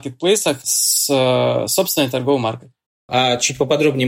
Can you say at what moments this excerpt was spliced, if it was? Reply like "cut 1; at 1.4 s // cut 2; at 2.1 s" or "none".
cut 1; at 3.1 s